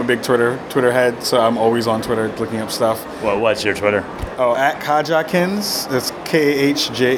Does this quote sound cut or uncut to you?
cut